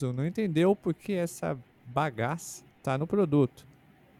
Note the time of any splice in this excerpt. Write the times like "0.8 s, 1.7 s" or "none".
0.9 s, 2.7 s